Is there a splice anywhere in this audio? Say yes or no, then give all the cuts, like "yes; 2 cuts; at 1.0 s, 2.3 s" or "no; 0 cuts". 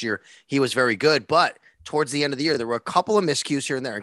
no; 0 cuts